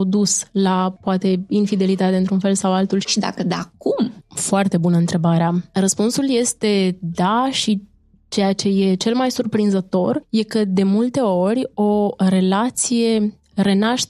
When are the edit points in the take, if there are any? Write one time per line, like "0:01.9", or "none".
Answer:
0:03.0

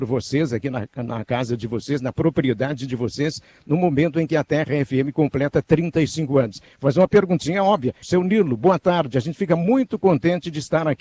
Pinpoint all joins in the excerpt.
0:08.0

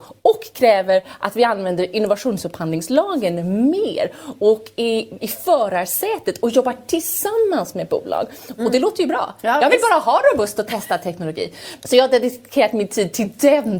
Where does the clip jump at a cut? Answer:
0:05.2
0:08.6
0:11.8

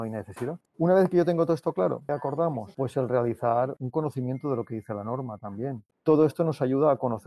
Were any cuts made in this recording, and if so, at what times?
0:02.1
0:05.9

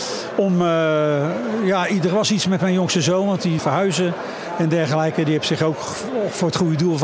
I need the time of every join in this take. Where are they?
0:03.6

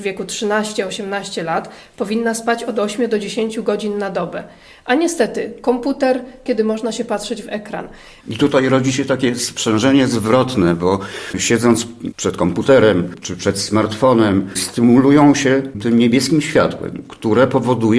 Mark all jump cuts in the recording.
0:06.5
0:08.2

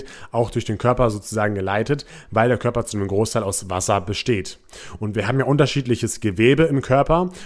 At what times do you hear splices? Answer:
none

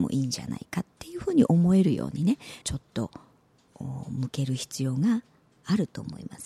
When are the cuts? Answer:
0:02.6

